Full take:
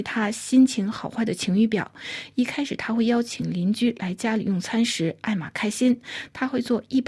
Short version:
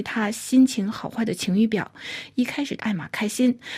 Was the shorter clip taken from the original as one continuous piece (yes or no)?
no